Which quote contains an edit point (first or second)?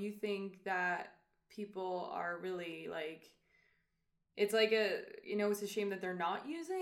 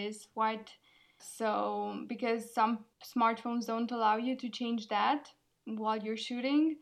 second